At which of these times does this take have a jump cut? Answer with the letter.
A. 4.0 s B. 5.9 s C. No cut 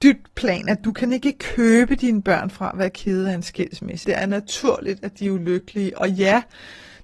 A